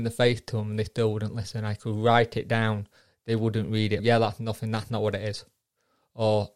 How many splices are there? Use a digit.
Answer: 1